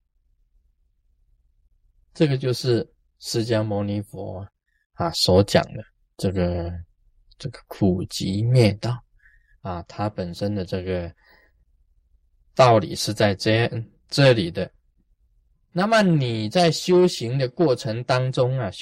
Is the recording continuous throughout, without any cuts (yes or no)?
yes